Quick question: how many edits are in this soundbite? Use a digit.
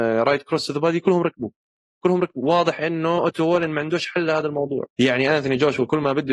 1